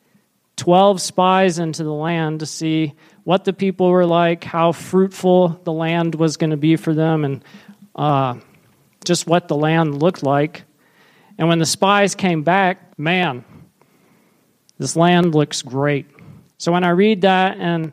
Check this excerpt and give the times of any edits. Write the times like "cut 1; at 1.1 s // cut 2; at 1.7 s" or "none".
cut 1; at 12.9 s // cut 2; at 16.5 s